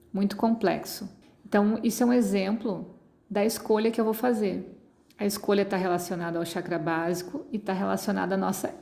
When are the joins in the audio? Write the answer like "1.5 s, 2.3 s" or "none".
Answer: 1.2 s